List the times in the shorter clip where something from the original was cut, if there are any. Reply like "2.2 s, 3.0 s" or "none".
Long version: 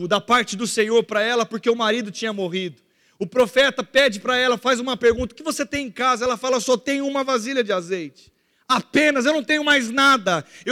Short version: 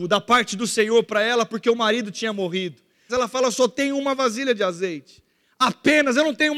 3.1 s